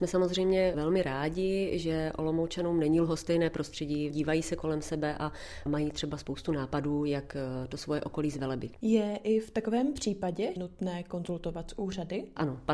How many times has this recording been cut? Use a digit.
2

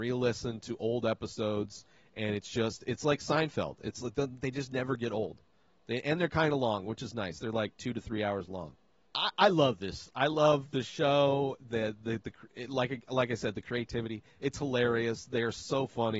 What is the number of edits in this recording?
1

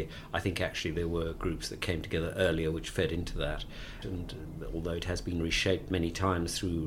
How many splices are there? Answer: 1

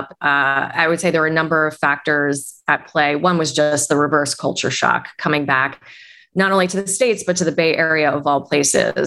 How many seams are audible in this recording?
0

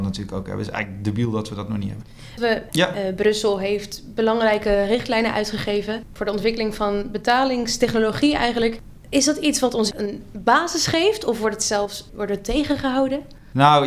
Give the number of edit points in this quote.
1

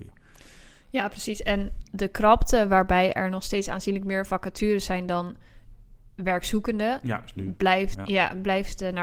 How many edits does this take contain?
1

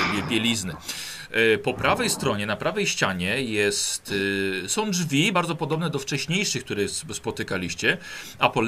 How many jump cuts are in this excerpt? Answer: 0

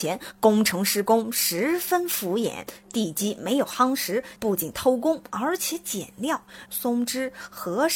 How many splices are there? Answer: 2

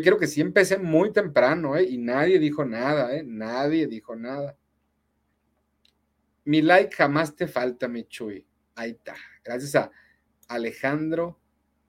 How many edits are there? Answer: 0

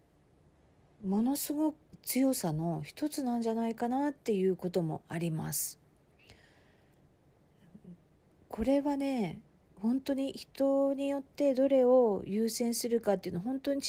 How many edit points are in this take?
1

